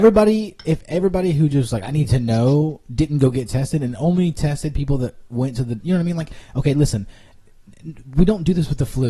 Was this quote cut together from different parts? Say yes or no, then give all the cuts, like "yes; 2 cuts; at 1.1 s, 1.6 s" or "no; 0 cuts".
no; 0 cuts